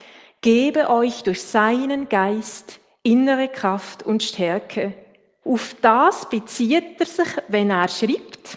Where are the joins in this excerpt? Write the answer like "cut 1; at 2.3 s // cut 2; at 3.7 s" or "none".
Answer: cut 1; at 5.4 s